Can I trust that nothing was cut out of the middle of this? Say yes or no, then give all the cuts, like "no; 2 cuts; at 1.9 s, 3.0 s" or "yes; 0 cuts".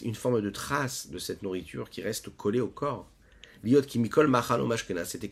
yes; 0 cuts